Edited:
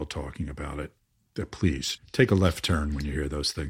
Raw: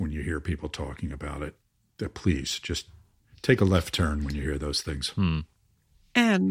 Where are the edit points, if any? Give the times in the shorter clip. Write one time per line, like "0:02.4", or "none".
0:02.0